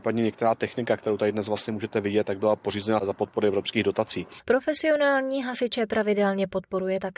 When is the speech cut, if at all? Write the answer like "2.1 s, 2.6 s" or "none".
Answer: 4.4 s